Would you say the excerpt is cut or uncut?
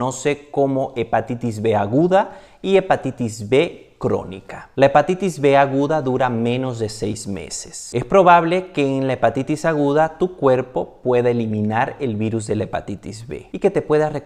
uncut